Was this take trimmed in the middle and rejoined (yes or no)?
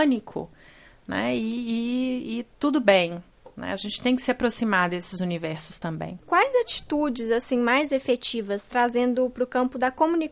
no